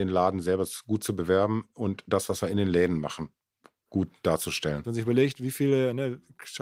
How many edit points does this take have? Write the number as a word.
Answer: one